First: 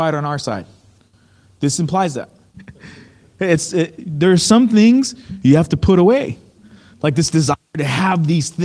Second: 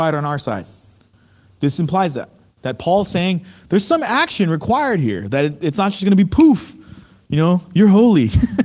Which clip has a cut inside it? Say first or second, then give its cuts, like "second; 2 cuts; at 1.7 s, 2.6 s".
first; 2 cuts; at 2.5 s, 6.9 s